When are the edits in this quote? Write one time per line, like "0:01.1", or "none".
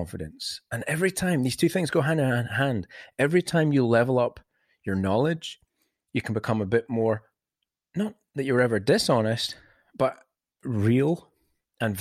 none

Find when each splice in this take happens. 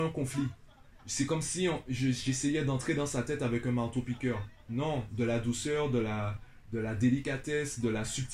none

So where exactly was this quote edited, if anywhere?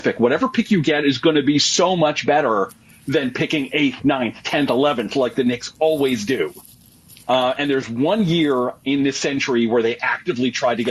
none

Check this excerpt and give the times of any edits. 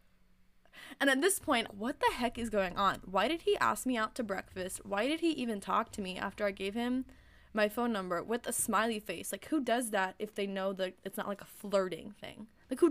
0:01.7

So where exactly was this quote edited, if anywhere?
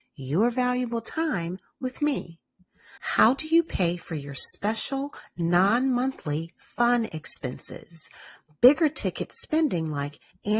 0:03.0

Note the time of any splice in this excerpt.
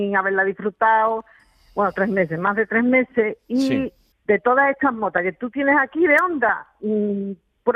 0:04.1

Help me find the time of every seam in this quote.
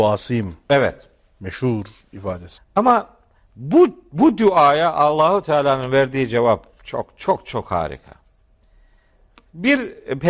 0:02.6

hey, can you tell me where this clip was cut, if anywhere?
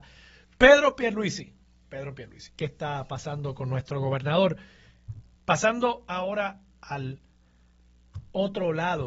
0:02.5
0:05.4

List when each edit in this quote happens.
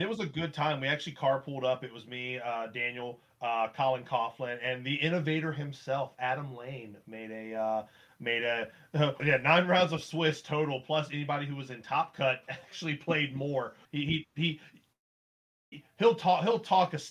0:09.2
0:13.8

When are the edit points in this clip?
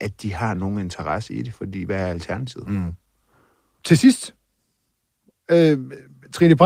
none

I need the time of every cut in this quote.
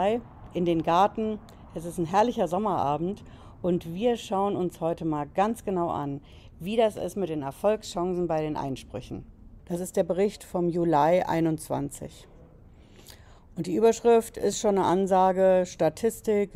0:09.6

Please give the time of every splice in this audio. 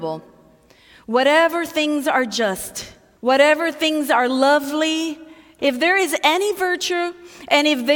0:03.2
0:05.6

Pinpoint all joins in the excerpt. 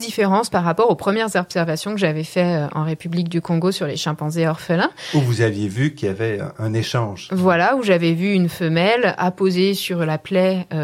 none

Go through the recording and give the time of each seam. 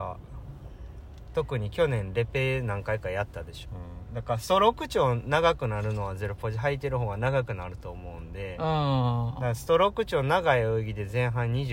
0:03.7

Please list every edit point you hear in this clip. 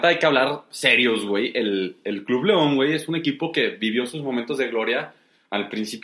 none

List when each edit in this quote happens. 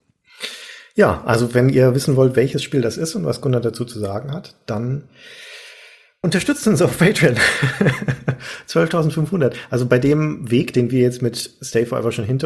none

